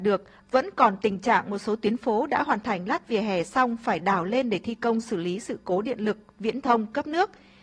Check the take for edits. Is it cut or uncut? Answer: uncut